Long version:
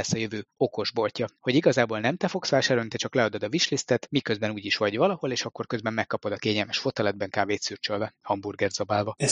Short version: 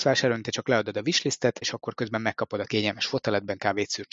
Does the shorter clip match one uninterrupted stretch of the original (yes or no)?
no